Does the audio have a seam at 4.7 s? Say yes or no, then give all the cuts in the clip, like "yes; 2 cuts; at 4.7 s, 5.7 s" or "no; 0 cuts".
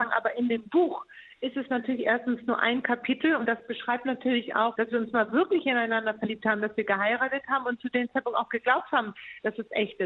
yes; 1 cut; at 4.7 s